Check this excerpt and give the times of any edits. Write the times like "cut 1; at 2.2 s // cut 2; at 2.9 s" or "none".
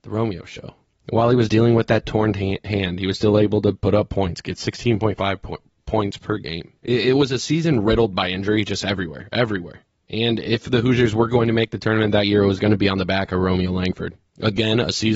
none